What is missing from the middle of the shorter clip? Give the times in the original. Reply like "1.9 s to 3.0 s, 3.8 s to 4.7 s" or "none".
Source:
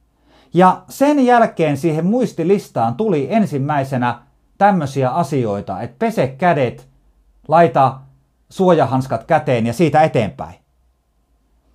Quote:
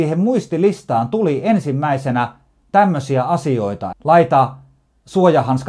5.8 s to 7.4 s